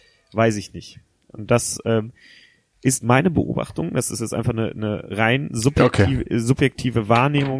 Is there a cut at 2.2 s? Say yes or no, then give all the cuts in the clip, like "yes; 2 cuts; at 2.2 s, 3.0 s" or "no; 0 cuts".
no; 0 cuts